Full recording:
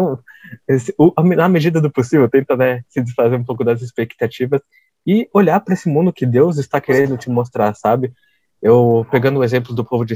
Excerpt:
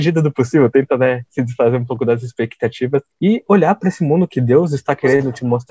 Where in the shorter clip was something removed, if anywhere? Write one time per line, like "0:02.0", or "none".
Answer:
0:03.1

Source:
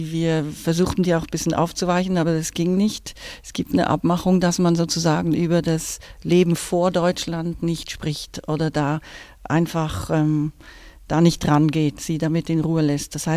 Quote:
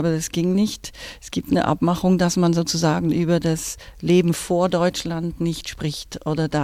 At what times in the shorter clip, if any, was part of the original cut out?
none

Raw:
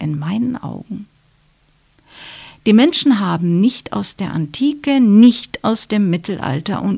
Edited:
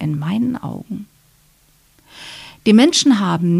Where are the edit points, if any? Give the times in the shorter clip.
none

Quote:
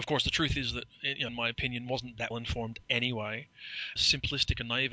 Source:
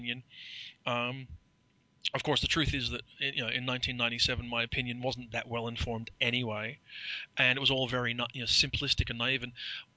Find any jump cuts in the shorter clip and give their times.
0:01.3
0:02.3
0:04.0

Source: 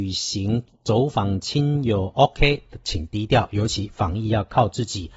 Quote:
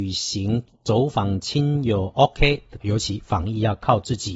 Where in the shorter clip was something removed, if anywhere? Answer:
0:02.8

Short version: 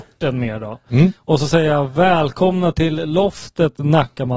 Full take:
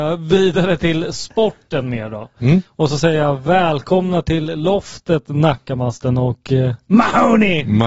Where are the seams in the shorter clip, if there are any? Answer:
none

